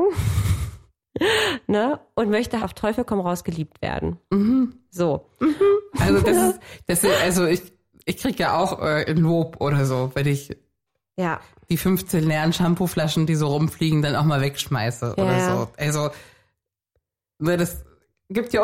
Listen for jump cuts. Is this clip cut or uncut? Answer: cut